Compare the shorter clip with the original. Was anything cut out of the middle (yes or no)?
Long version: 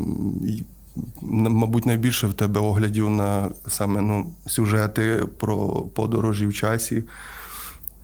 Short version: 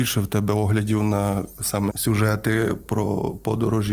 yes